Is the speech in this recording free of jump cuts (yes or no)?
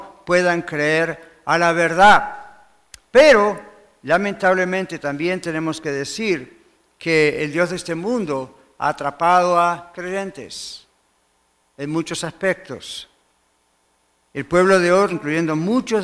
no